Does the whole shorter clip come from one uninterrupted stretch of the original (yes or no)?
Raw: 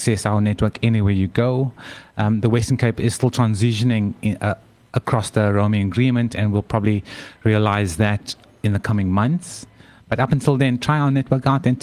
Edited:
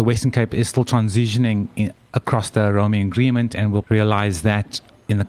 no